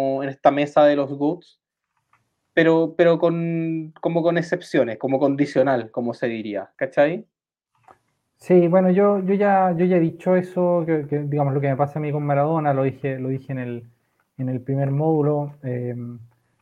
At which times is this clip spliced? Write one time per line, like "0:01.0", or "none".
none